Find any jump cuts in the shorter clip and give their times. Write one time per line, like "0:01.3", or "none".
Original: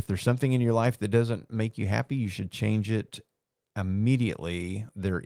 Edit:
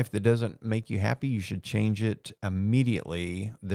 0:02.4